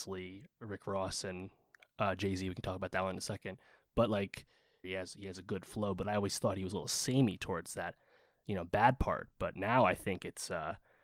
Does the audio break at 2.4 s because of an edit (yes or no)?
no